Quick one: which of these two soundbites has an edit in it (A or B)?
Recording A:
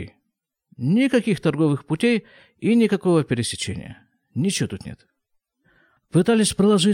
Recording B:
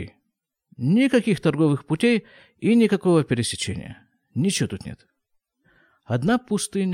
A